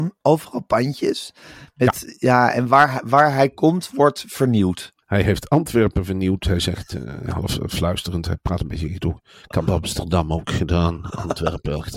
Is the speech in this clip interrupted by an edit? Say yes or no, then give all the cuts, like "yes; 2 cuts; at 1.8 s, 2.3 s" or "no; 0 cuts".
yes; 1 cut; at 5.0 s